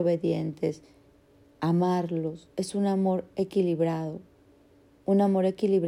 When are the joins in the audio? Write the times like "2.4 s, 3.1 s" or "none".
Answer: 2.5 s